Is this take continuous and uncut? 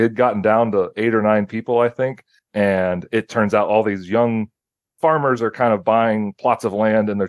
no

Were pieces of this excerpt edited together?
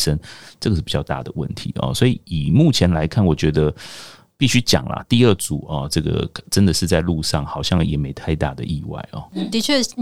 no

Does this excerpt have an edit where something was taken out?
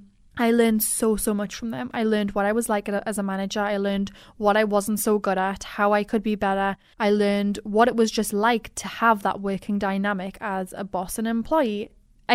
no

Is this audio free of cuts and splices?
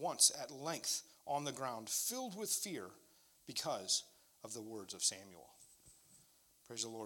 yes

